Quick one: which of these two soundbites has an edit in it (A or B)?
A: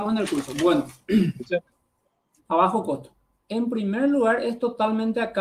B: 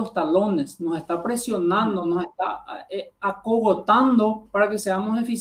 A